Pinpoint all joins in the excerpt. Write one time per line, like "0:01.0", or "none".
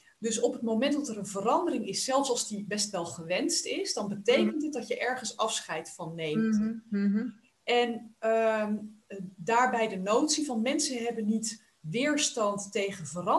none